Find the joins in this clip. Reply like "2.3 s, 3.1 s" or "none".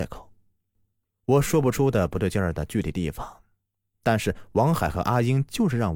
1.0 s

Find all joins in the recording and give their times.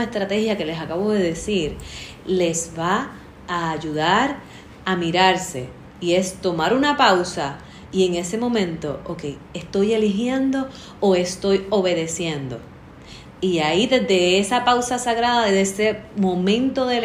none

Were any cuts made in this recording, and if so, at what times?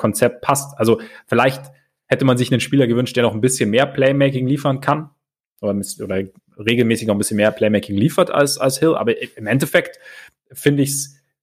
none

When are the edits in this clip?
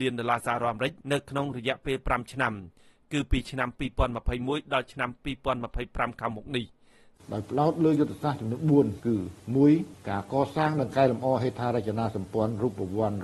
1.0 s

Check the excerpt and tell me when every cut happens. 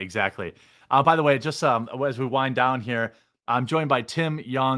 none

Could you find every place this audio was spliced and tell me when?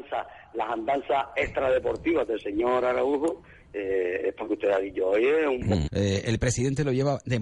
5.9 s

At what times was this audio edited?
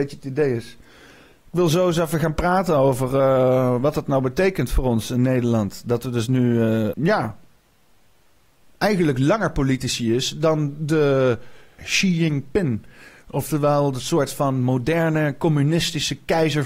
6.9 s, 11.8 s

